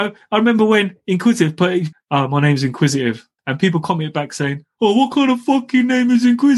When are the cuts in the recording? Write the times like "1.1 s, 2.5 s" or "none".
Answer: 1.9 s, 3.4 s